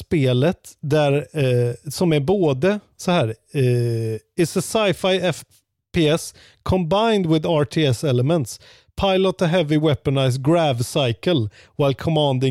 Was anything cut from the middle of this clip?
no; 0 cuts

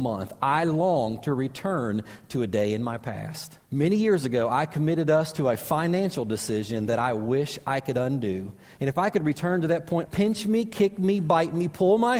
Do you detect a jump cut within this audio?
yes; 2 cuts; at 3.6 s, 10.1 s

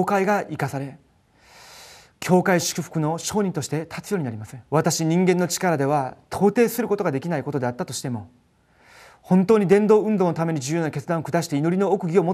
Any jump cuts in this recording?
yes; 1 cut; at 4.7 s

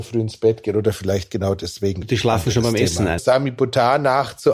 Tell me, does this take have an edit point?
yes; 2 cuts; at 2.0 s, 3.2 s

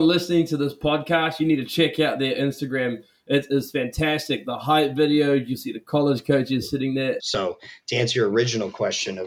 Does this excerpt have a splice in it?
yes; 1 cut; at 7.2 s

